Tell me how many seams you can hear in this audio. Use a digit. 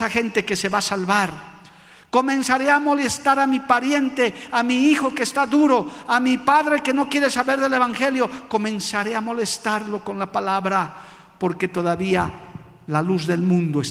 0